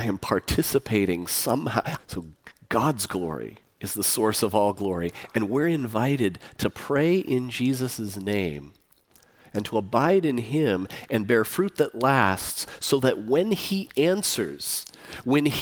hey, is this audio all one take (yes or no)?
no